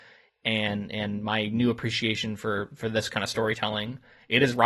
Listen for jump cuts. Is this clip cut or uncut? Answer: uncut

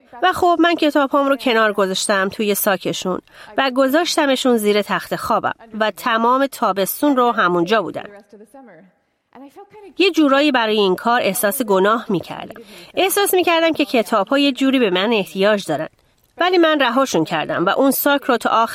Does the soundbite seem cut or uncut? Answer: uncut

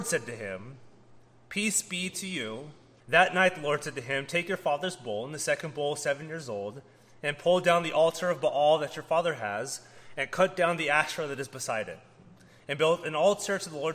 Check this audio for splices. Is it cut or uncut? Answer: cut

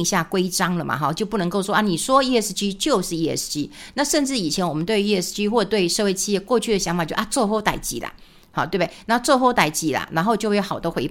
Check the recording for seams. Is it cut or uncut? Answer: uncut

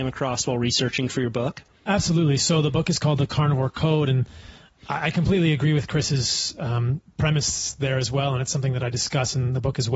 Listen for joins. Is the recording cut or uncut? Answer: uncut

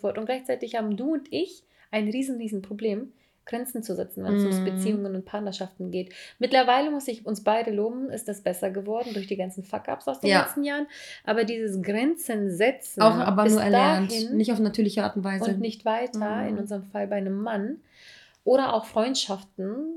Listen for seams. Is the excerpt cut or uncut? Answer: uncut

